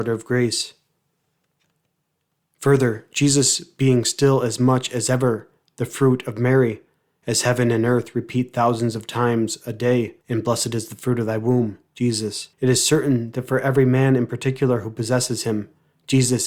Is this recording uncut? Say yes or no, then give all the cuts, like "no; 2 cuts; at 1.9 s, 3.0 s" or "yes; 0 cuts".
no; 2 cuts; at 10.2 s, 12.5 s